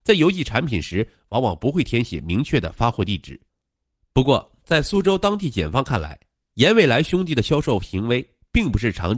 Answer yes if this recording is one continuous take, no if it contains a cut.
yes